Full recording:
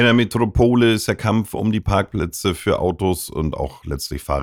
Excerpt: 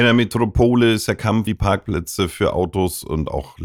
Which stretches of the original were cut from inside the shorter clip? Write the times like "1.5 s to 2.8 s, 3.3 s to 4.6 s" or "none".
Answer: 1.5 s to 1.7 s